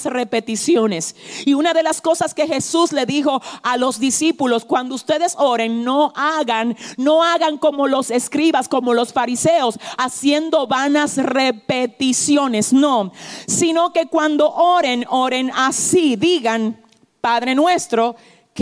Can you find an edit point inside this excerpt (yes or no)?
no